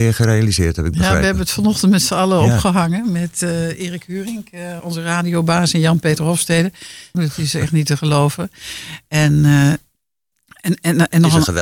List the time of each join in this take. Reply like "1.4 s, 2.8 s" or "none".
4.8 s, 7.1 s